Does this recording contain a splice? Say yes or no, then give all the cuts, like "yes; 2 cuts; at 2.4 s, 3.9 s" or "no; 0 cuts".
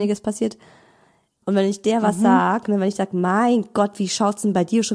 yes; 1 cut; at 1.4 s